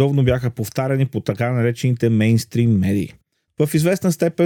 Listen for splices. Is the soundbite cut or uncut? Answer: cut